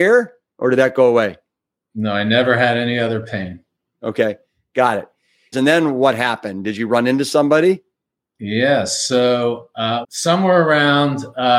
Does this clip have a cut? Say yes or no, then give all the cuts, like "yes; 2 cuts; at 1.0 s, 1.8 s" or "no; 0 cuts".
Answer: yes; 2 cuts; at 5.5 s, 10.0 s